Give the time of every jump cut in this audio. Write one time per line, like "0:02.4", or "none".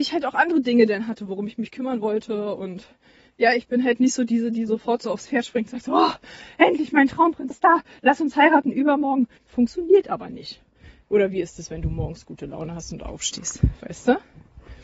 0:07.5
0:09.4
0:11.0